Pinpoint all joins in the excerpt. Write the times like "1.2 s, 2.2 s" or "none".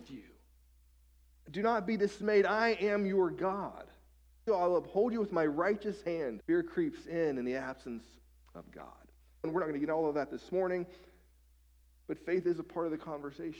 4.5 s, 6.4 s, 9.4 s